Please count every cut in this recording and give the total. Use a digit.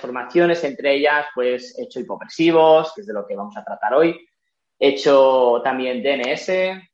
1